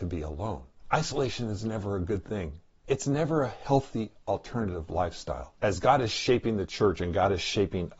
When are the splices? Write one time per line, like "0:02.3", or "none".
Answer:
0:05.6